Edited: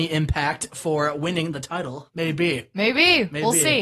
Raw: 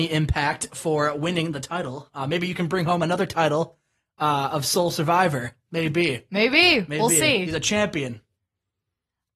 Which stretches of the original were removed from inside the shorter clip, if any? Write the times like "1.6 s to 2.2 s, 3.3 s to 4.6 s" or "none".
2.1 s to 5.7 s